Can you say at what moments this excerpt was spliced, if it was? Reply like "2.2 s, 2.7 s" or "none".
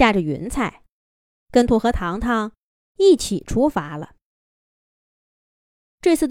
1.7 s